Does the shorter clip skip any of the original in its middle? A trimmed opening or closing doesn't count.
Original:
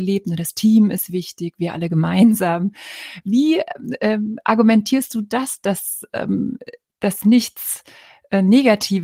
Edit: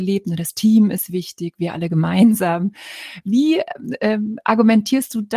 no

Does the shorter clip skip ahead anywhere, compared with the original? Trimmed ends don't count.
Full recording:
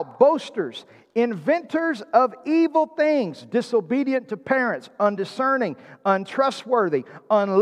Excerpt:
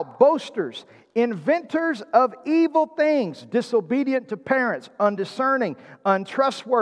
no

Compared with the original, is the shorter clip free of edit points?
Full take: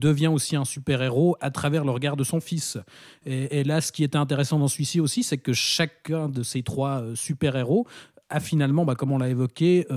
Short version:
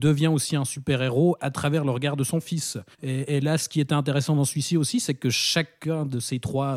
no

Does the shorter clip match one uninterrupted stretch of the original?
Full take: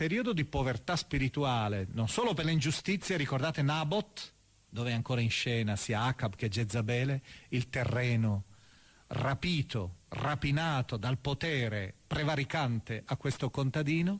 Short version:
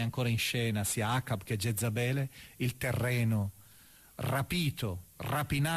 yes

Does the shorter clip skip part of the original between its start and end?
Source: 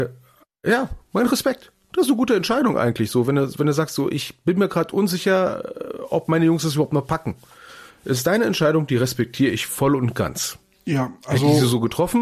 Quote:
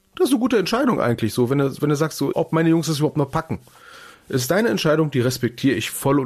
yes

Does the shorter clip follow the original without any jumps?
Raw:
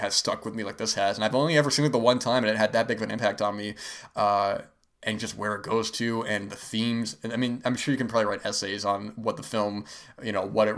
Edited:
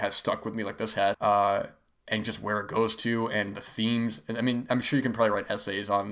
no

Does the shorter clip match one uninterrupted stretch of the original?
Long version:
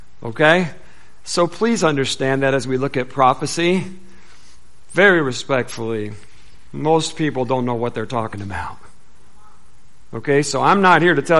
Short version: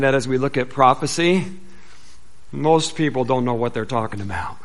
no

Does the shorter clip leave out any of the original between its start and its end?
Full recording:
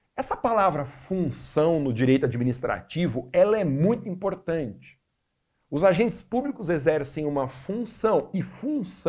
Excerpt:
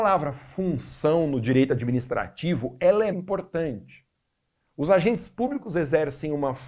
yes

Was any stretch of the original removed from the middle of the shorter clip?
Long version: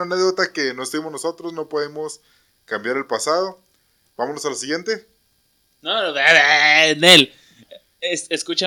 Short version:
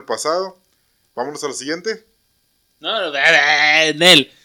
no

